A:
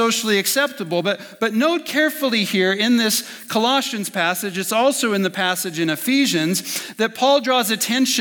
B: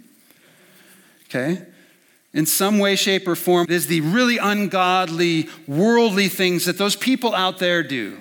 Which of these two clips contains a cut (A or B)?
B